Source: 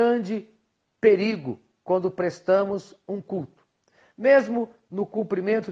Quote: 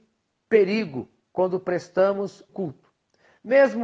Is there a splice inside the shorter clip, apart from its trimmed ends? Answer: yes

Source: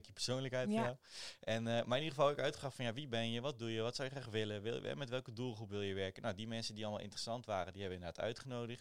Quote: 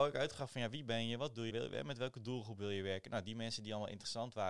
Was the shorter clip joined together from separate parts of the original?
yes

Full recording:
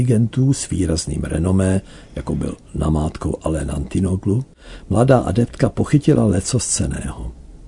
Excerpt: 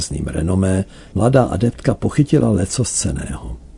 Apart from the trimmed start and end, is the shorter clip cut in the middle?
yes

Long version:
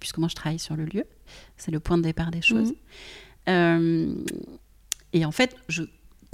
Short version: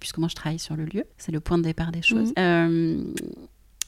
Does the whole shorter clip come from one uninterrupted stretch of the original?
no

